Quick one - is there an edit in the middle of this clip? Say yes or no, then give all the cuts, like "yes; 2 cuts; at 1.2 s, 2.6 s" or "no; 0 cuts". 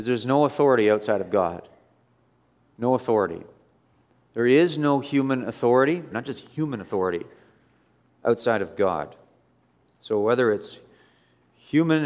yes; 1 cut; at 6.1 s